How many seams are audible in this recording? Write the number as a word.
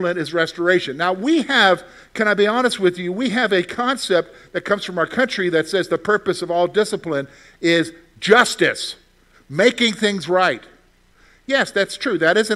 one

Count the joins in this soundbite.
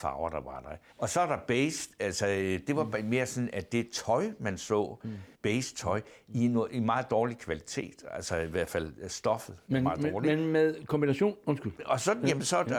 two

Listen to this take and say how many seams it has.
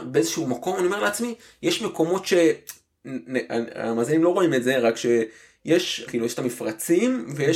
one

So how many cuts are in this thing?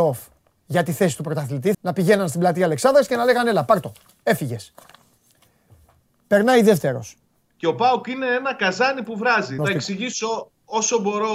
three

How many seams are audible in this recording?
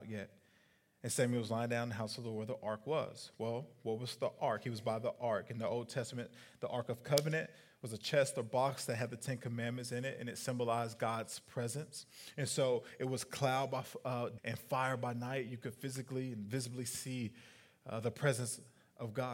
one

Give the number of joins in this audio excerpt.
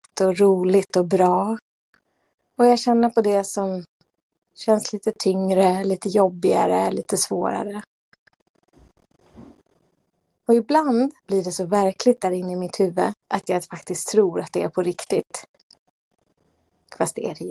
two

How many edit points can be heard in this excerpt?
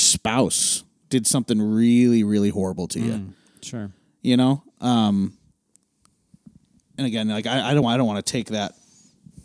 zero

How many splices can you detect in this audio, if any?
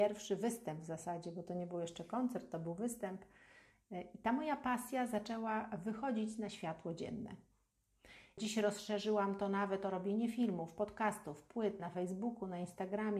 two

